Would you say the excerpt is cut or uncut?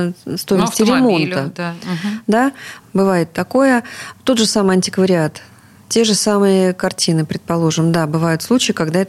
cut